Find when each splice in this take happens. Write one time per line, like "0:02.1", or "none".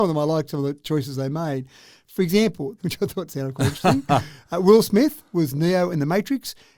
0:02.8